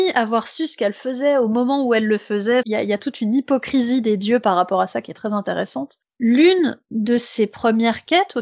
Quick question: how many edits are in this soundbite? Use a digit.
2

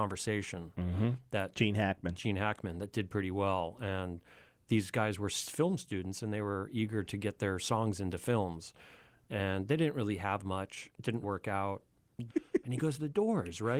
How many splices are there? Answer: 2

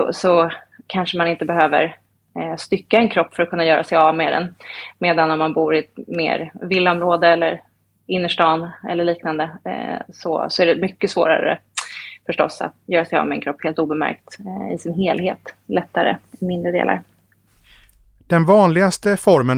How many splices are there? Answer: 1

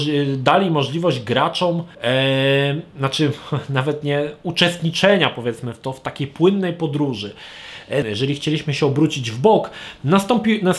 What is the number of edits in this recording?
2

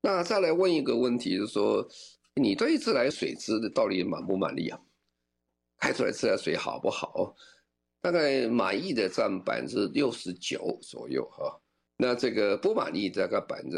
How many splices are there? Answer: 1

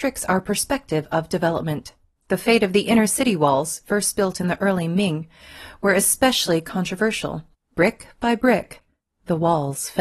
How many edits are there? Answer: 2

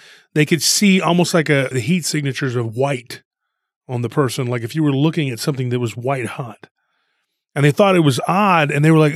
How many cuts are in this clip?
1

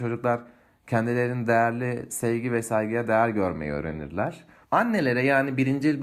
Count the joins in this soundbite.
1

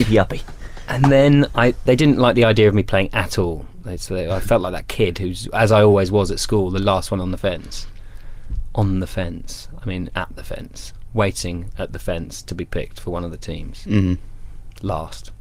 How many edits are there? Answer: 1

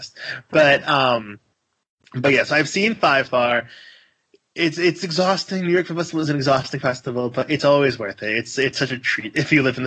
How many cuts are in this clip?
1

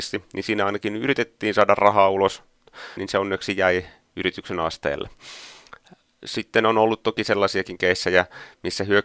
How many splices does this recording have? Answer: 1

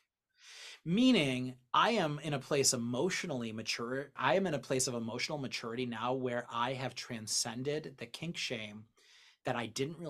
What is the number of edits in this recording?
1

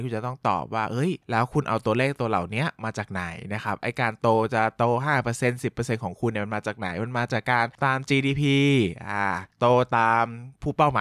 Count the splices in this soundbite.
1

